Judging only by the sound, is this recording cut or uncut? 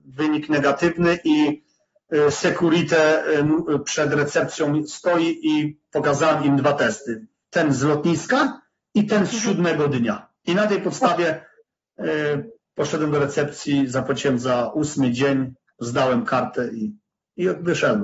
uncut